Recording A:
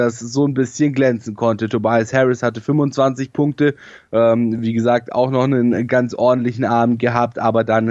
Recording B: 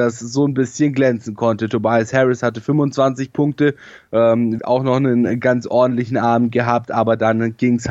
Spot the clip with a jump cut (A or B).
B